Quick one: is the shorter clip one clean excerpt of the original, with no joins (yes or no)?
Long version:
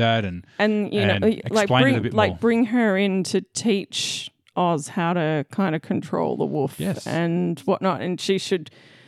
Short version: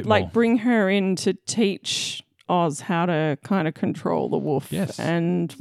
yes